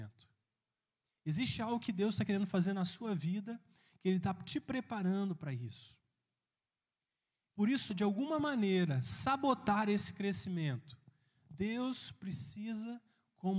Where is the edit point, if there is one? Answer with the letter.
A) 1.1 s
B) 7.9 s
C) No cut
B